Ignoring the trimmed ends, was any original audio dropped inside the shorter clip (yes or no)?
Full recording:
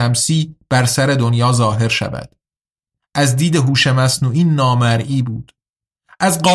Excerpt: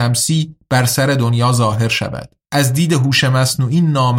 yes